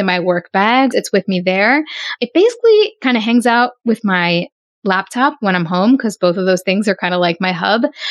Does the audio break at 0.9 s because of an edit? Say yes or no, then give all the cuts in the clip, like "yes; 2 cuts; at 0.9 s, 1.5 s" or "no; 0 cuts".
yes; 1 cut; at 0.9 s